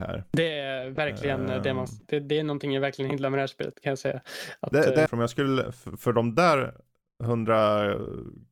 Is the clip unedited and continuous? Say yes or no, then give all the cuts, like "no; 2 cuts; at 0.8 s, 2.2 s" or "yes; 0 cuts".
no; 2 cuts; at 3.7 s, 5.1 s